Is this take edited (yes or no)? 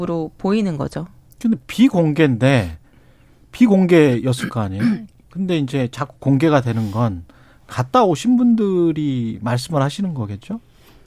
no